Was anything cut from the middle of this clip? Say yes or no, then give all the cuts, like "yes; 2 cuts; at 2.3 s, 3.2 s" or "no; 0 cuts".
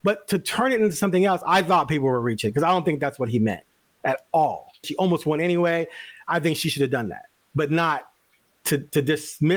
yes; 1 cut; at 4.8 s